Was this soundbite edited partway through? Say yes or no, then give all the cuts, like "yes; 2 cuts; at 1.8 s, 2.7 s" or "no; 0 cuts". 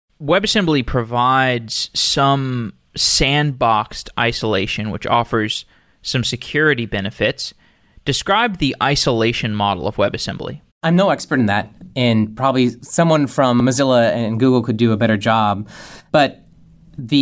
yes; 1 cut; at 10.7 s